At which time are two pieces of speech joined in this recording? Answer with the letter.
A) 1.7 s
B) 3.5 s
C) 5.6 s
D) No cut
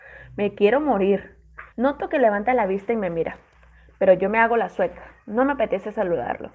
A